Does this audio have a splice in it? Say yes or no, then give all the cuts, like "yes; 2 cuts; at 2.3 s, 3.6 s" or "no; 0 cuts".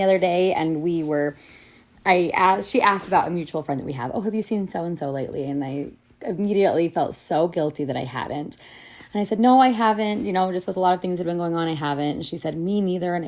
no; 0 cuts